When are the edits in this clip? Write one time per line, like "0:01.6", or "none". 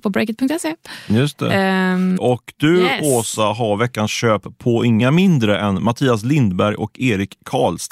0:02.2